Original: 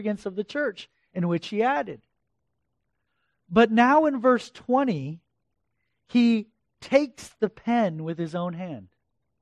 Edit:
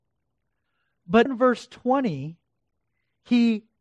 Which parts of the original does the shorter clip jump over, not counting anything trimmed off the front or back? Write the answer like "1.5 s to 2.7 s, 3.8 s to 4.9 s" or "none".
3.7 s to 4.1 s